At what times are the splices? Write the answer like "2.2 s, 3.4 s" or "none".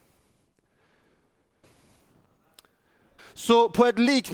1.6 s, 3.2 s